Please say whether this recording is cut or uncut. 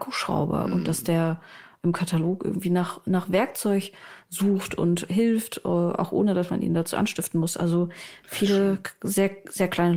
uncut